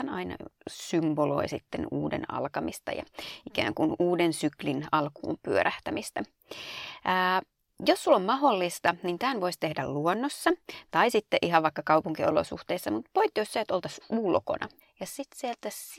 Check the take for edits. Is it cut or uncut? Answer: cut